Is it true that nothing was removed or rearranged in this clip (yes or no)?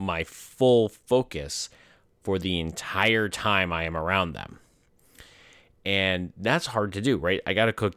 yes